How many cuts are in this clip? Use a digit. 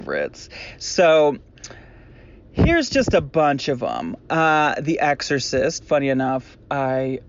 1